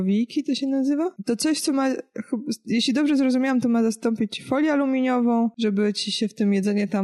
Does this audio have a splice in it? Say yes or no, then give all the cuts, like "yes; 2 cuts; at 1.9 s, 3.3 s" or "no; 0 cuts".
no; 0 cuts